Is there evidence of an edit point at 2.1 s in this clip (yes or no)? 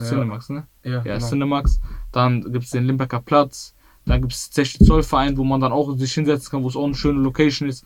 no